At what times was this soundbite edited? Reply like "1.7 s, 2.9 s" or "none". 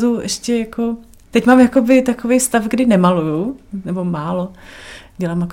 none